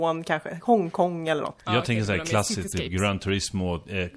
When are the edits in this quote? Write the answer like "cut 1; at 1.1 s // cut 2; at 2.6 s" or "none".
cut 1; at 1.6 s

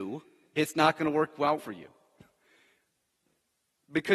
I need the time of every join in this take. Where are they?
cut 1; at 1.6 s

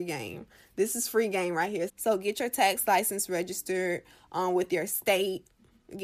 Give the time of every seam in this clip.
cut 1; at 1.9 s

